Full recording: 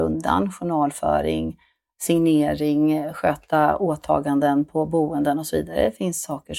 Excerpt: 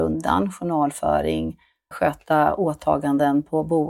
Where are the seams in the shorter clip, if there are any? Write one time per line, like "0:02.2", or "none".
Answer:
0:01.9